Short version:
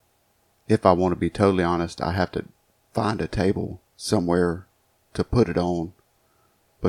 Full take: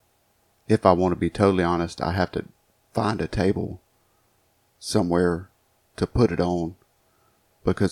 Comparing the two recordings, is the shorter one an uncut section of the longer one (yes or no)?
no